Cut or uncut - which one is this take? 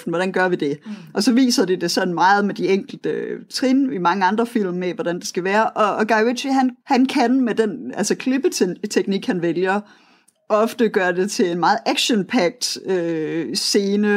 cut